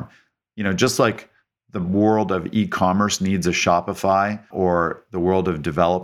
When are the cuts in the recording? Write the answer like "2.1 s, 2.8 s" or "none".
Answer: 4.5 s